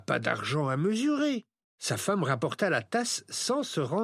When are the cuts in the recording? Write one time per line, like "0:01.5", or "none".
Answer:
0:01.6